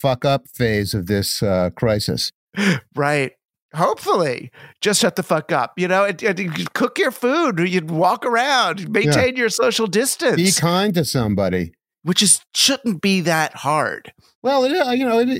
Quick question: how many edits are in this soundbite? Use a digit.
0